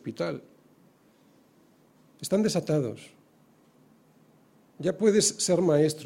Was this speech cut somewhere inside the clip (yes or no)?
yes